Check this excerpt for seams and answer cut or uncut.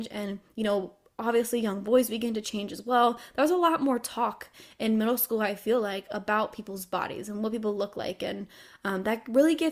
uncut